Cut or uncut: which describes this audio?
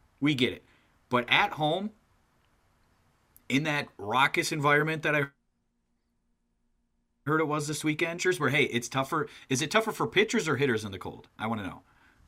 uncut